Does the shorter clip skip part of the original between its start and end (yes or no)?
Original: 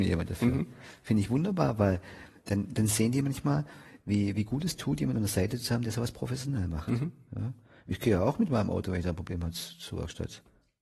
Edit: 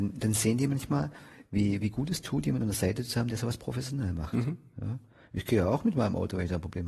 no